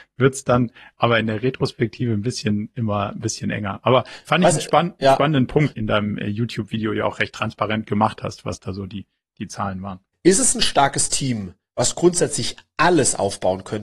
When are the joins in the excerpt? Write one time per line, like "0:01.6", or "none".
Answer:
0:05.7
0:10.1

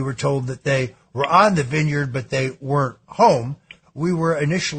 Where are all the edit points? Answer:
0:03.8

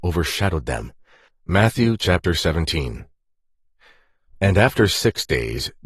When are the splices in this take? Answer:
0:01.3

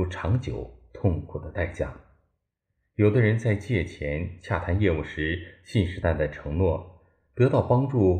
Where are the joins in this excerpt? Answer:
0:06.0

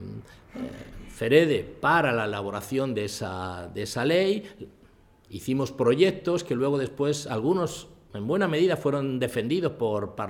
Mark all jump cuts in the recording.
none

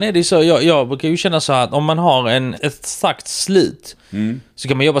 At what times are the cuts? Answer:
0:02.5

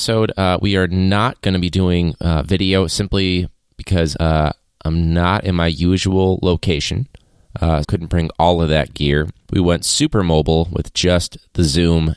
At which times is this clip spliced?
0:07.8

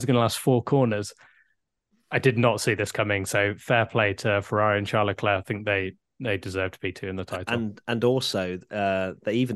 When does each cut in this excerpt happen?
none

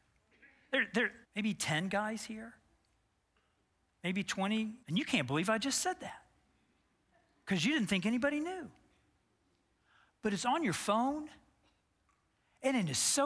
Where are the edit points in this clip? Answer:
0:01.2
0:04.8

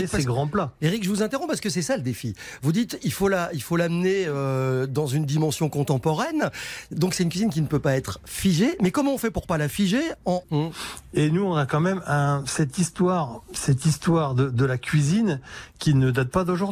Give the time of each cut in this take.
0:10.4

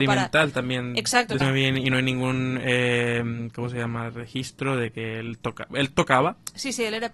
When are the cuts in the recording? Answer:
0:01.4

